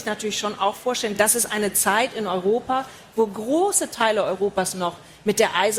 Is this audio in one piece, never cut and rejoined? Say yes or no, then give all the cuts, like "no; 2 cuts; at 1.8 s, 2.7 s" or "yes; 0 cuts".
yes; 0 cuts